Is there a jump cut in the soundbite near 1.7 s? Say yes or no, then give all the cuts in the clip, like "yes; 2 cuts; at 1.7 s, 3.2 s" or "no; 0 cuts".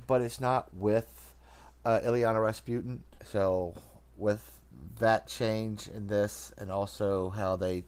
no; 1 cut; at 3.2 s